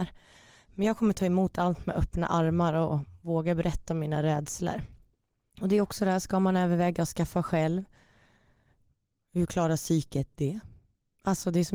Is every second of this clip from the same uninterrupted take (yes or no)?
yes